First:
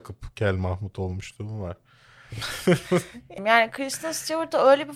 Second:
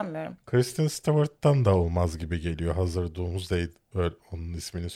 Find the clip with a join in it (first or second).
first